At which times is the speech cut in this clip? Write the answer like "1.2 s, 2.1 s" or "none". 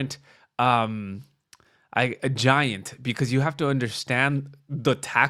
none